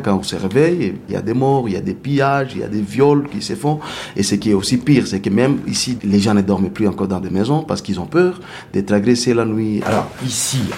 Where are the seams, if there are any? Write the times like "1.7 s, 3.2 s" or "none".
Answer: 6.0 s, 9.8 s